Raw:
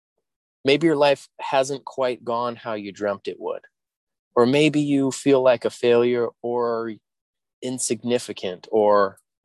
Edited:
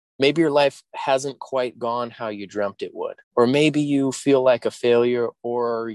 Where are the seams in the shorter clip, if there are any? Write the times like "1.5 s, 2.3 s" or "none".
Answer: 3.2 s